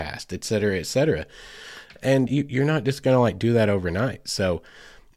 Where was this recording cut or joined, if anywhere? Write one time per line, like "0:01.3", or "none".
0:02.3